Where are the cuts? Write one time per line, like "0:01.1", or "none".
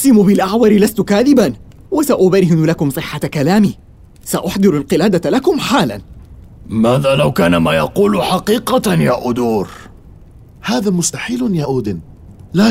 none

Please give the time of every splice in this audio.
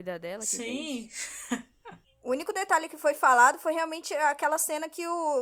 0:02.0

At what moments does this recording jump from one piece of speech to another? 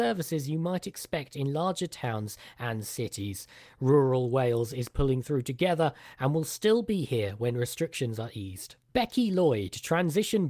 none

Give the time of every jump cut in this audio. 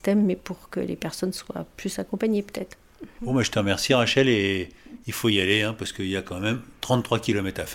none

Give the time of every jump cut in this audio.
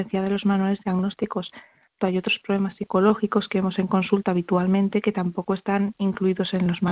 0:02.0

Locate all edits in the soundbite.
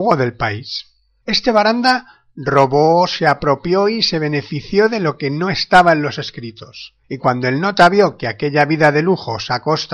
0:01.2
0:07.0

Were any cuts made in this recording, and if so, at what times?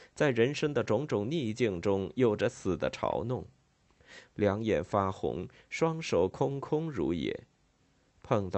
0:04.2

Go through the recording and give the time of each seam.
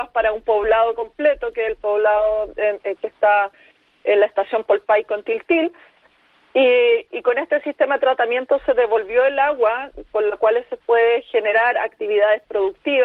none

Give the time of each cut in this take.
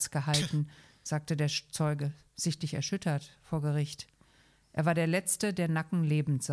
none

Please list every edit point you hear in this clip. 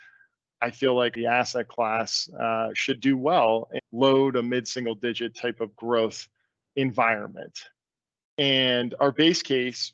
0:03.8

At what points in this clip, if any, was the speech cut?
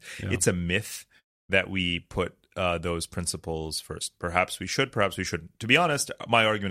none

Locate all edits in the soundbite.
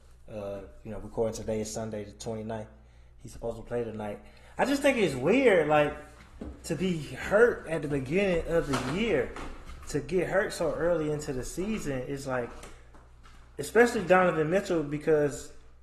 none

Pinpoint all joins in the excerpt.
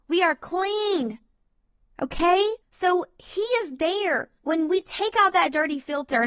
0:02.6
0:04.4

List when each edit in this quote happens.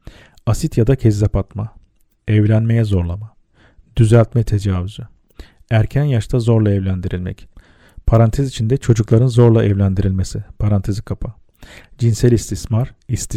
none

